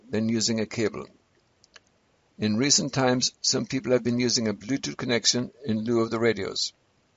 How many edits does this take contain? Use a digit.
0